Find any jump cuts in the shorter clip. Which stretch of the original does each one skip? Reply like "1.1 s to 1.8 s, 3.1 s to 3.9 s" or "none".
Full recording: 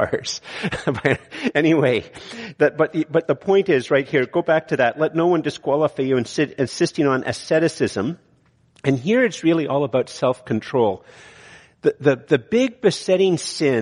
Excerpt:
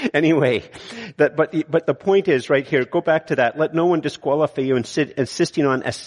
none